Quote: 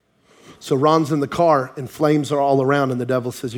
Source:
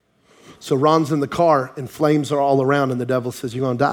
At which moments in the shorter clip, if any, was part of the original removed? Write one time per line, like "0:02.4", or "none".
none